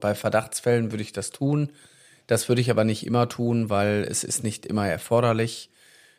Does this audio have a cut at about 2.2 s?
no; 0 cuts

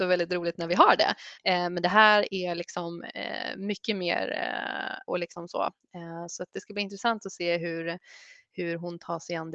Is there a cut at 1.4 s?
yes; 2 cuts; at 1.4 s, 5.1 s

